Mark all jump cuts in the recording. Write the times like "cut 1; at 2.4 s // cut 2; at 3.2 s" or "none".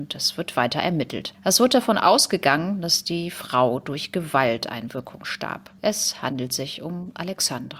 cut 1; at 5.8 s